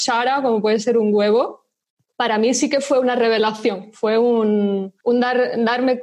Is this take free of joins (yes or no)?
yes